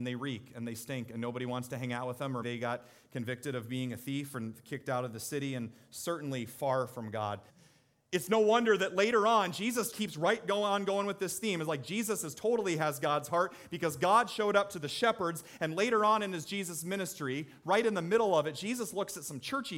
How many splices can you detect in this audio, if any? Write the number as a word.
three